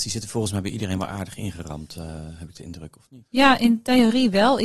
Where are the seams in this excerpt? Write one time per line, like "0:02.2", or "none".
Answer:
none